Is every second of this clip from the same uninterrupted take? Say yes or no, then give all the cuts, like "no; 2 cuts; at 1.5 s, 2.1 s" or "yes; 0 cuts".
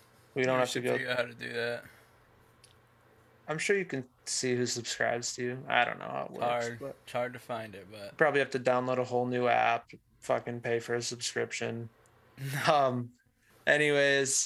no; 1 cut; at 12.6 s